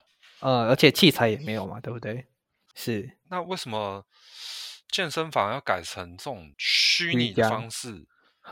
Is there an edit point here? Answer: yes; 2 cuts; at 2.7 s, 6.5 s

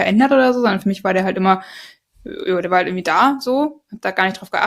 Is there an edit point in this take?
no; 0 cuts

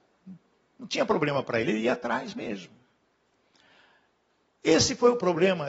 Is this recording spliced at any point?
yes; 1 cut; at 1.6 s

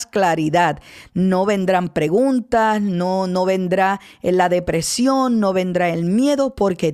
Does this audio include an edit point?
no; 0 cuts

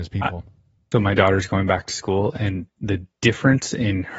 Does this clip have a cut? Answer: yes; 2 cuts; at 0.9 s, 2.7 s

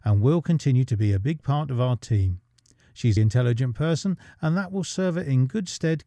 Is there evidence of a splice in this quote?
yes; 1 cut; at 3.2 s

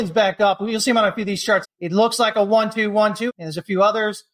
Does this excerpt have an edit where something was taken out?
yes; 2 cuts; at 1.6 s, 3.3 s

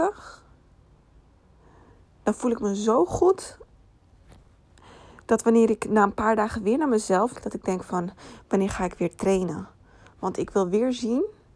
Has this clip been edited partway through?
yes; 1 cut; at 7.3 s

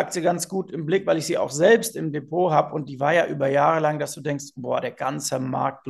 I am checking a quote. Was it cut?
no; 0 cuts

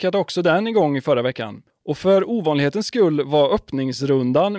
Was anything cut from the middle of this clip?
no; 0 cuts

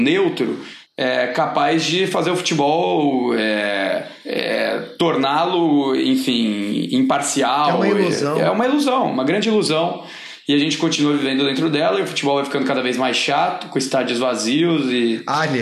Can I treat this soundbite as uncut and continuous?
yes; 0 cuts

